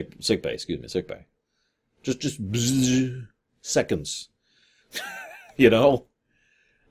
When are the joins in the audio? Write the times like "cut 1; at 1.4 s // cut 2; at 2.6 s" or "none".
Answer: none